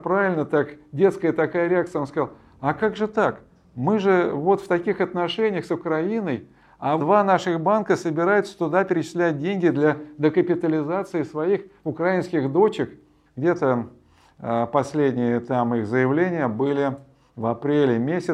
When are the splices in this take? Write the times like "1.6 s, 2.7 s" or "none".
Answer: 7.0 s, 13.3 s